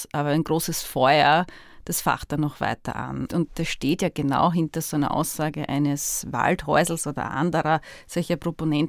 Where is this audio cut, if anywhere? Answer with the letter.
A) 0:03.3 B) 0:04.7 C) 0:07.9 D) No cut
A